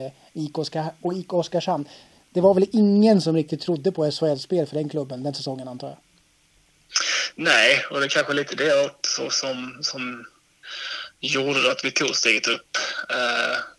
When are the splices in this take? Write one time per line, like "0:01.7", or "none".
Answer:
none